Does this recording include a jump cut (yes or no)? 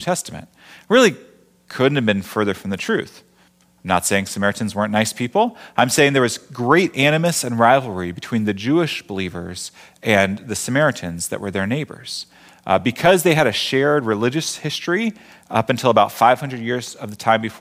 no